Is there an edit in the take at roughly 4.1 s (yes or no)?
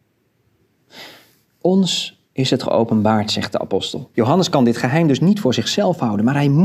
yes